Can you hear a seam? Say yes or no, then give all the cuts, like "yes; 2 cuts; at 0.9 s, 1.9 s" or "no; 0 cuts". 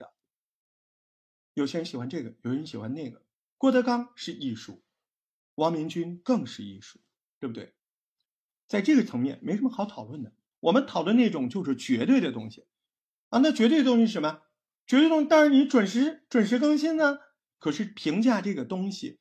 yes; 1 cut; at 17.5 s